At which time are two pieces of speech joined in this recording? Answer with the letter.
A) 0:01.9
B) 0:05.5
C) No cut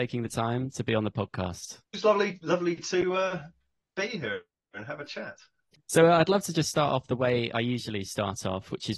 A